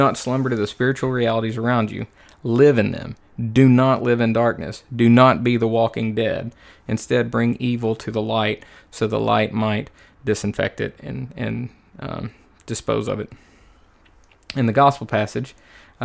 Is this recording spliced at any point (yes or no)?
no